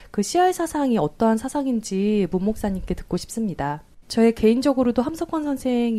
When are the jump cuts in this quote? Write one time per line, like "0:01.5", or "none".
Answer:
0:04.0